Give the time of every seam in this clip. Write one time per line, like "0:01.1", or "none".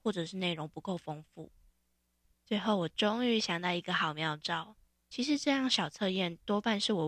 0:05.0